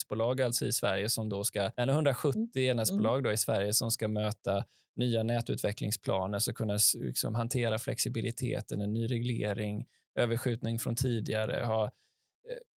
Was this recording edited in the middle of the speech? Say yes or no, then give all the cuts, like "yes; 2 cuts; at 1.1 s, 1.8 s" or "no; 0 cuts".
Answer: yes; 1 cut; at 1.7 s